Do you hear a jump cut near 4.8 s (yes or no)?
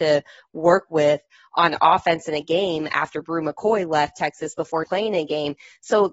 yes